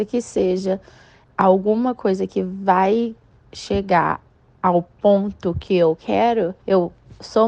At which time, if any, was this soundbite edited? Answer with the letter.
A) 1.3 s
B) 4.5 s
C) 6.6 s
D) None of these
C